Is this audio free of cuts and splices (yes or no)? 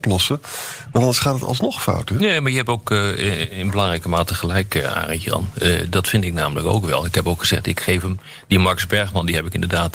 yes